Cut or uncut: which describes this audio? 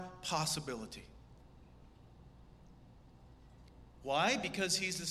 uncut